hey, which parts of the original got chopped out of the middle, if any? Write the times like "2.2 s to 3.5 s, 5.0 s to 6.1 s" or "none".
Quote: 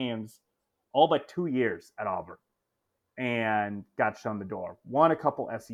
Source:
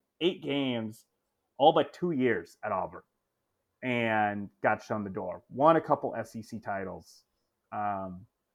none

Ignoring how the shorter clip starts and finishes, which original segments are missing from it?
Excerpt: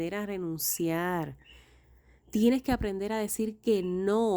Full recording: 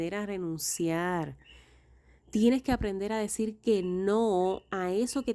none

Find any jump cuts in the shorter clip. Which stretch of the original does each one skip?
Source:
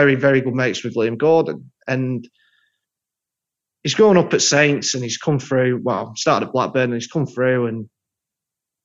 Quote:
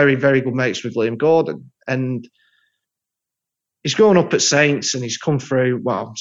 none

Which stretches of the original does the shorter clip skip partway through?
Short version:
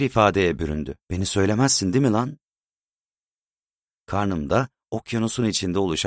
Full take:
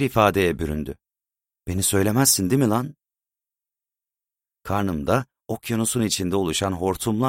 1.0 s to 1.6 s

